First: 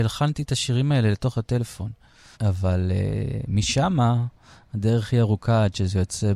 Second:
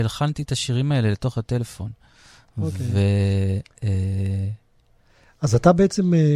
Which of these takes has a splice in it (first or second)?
first